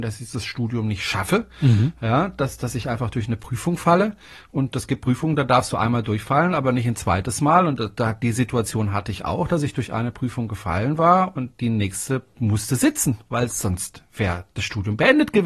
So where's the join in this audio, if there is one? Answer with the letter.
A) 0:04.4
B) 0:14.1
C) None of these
B